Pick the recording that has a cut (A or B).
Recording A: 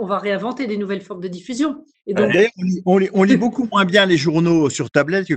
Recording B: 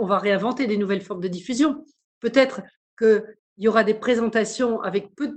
A